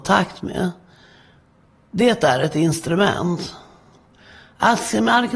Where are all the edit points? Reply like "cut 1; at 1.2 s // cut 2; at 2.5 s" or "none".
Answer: none

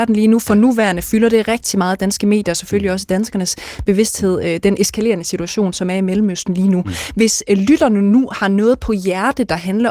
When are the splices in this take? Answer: cut 1; at 5.7 s

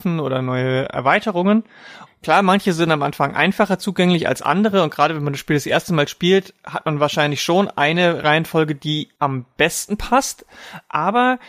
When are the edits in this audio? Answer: cut 1; at 2.1 s

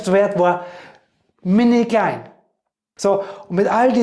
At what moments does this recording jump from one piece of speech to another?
cut 1; at 3.0 s

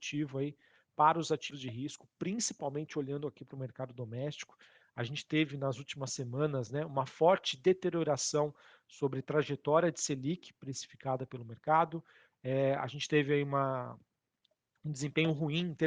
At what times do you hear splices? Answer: none

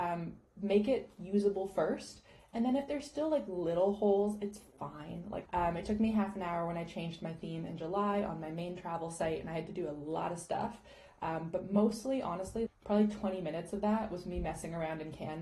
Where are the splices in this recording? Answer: cut 1; at 5.5 s // cut 2; at 12.7 s

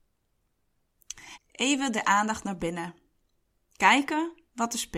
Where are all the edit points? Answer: cut 1; at 1.4 s

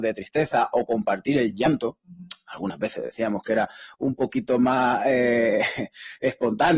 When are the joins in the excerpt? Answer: none

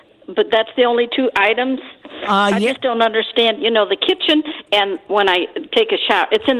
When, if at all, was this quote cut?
none

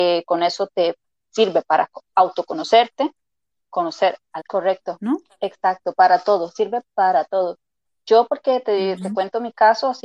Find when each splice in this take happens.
cut 1; at 4.4 s

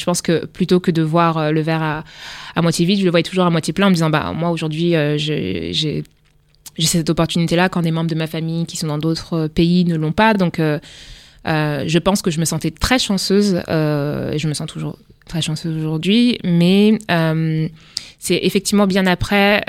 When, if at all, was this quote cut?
none

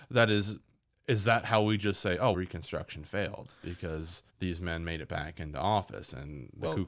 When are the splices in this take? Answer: cut 1; at 2.3 s // cut 2; at 4.3 s

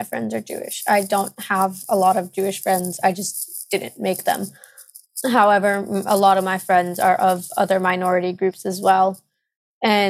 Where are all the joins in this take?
none

